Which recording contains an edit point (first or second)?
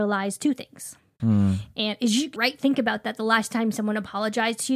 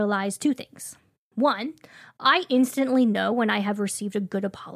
first